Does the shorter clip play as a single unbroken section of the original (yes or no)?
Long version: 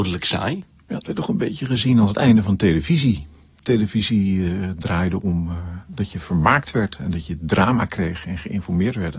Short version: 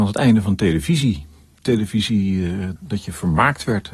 no